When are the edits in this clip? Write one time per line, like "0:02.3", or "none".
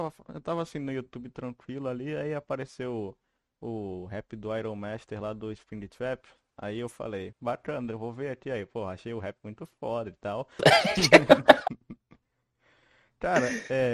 0:07.3
0:10.6